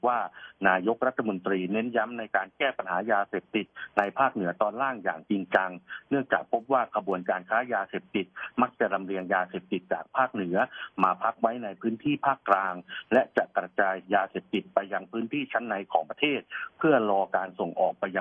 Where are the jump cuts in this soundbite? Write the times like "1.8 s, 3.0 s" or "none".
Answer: none